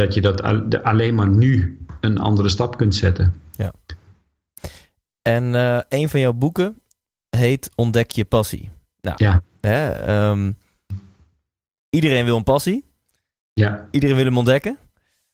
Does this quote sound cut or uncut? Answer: uncut